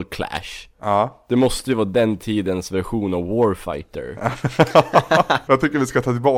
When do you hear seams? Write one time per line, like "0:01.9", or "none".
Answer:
0:05.5